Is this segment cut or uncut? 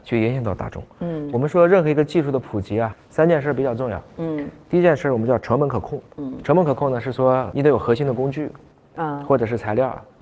uncut